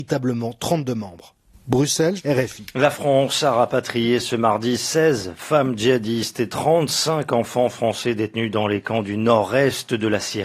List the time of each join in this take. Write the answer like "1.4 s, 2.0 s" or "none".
2.2 s

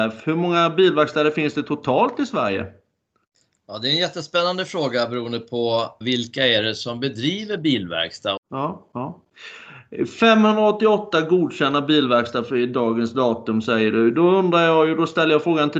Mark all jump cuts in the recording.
6.0 s, 8.4 s

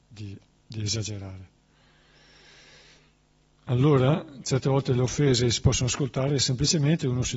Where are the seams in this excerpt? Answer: none

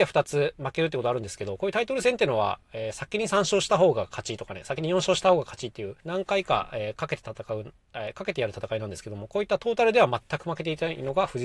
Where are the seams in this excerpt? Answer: 6.0 s

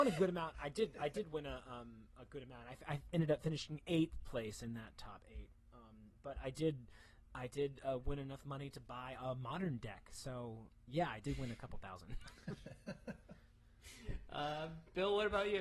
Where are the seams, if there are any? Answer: none

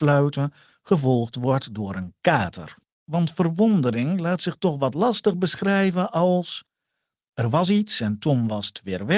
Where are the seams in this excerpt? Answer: 3.0 s

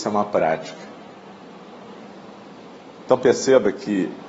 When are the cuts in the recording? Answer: 3.1 s

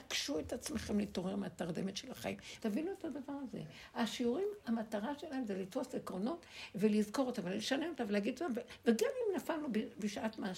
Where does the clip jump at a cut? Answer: 2.6 s

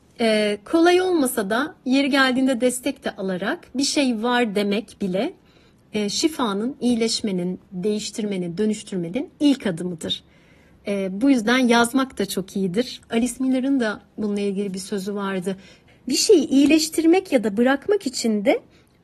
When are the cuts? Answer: 13.0 s, 15.9 s

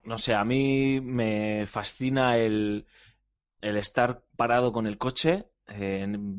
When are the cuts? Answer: none

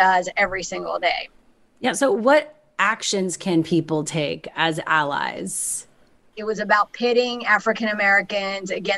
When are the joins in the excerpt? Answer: 6.3 s

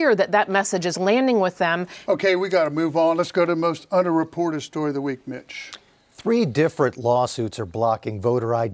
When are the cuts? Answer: 2.0 s

